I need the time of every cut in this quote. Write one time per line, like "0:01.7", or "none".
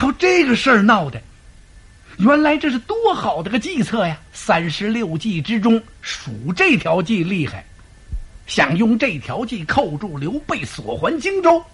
0:04.3
0:07.8